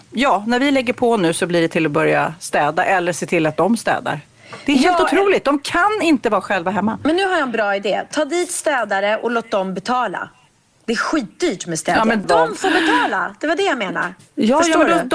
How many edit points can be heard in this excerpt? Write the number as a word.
one